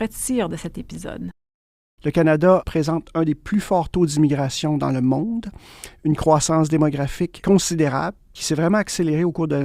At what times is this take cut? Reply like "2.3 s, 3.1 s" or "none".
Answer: 2.0 s